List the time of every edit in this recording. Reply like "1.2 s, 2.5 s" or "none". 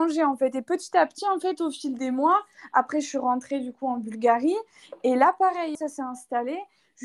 5.8 s